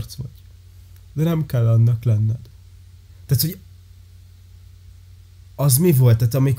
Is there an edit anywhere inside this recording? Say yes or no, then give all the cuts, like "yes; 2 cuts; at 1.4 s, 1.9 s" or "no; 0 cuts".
yes; 1 cut; at 3.1 s